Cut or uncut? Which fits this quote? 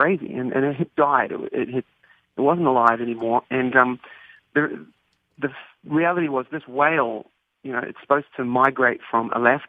uncut